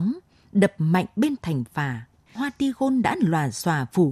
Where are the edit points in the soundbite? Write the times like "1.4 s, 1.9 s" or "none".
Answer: 2.2 s